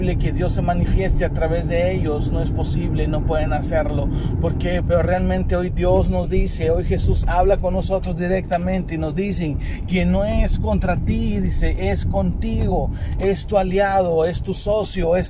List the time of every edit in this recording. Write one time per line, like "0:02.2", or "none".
0:04.8